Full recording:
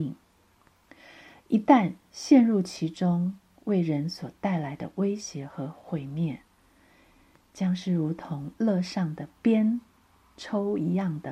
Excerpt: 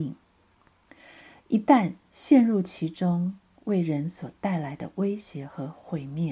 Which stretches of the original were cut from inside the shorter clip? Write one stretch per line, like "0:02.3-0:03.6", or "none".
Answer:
none